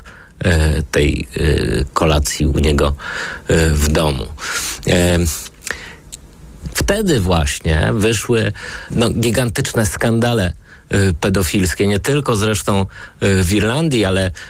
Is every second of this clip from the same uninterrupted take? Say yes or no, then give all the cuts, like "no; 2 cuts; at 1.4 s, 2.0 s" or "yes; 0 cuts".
no; 2 cuts; at 6.7 s, 8.9 s